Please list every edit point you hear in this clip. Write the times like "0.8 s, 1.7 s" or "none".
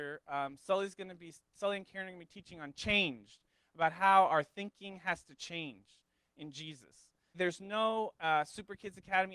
7.3 s